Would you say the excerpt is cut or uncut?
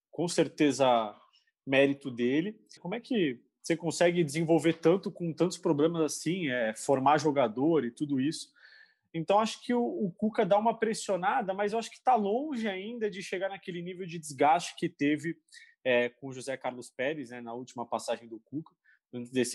cut